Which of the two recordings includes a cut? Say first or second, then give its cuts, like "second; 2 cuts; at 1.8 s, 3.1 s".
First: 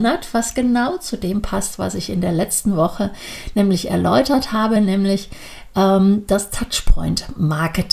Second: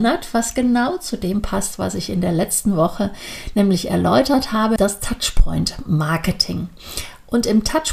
second; 1 cut; at 4.8 s